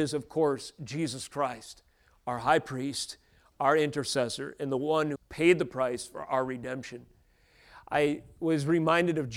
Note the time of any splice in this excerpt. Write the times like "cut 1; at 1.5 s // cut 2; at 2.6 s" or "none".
cut 1; at 5.2 s